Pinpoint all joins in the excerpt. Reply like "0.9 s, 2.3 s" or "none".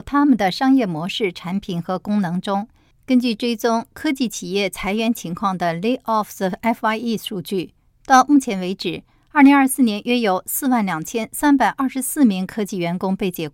2.9 s